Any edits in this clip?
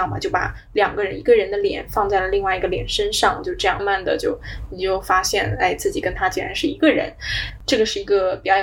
yes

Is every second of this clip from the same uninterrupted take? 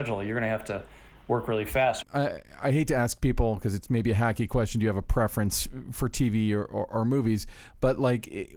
no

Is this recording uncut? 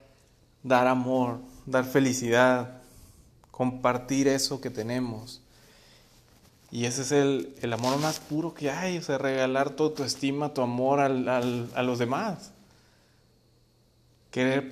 yes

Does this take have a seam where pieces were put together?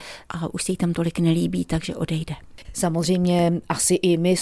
yes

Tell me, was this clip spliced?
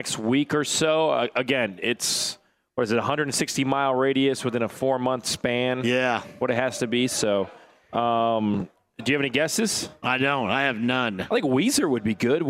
no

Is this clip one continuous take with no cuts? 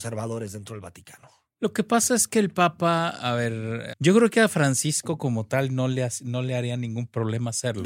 no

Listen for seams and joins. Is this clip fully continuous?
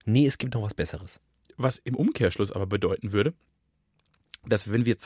yes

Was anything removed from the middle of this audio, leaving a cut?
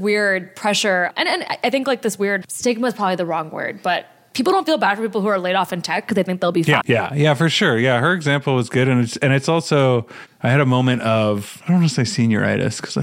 yes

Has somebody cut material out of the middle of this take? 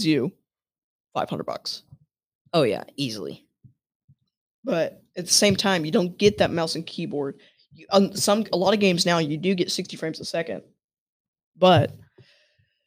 no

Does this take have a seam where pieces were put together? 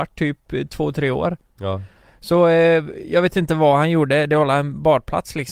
no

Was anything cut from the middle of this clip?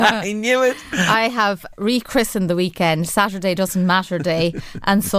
yes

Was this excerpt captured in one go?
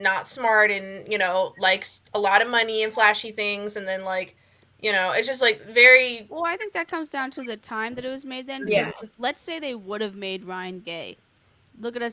yes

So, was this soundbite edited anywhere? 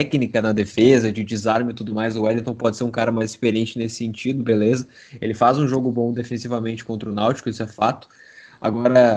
no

